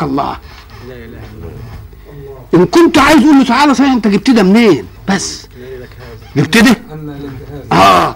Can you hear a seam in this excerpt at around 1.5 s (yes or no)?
no